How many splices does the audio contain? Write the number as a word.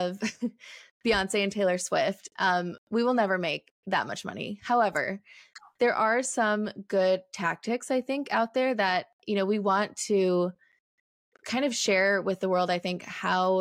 zero